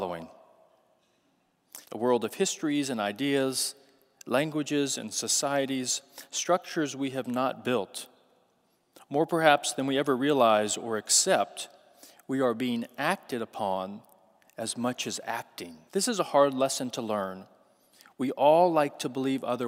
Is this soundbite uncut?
no; 2 cuts; at 1.8 s, 15.9 s

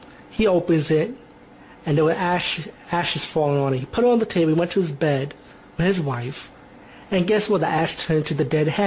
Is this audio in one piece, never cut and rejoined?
yes; 0 cuts

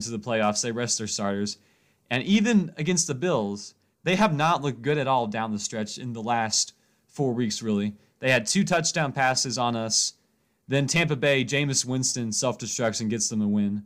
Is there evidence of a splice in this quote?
no; 0 cuts

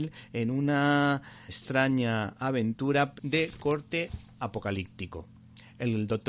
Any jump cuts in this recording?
yes; 2 cuts; at 1.5 s, 3.2 s

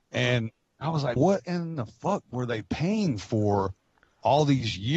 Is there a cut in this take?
yes; 1 cut; at 1.2 s

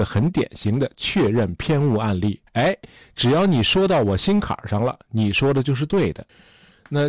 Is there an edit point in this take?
yes; 1 cut; at 2.5 s

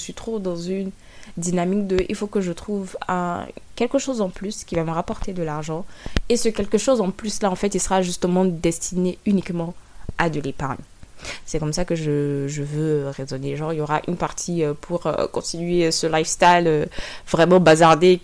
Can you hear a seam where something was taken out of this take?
no; 0 cuts

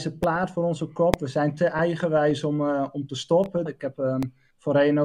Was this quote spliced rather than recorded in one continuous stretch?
yes; 1 cut; at 3.7 s

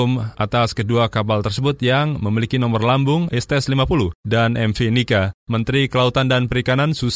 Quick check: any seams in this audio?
yes; 1 cut; at 5.4 s

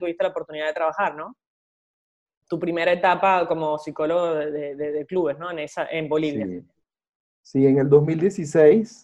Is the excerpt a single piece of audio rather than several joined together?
no; 1 cut; at 2.4 s

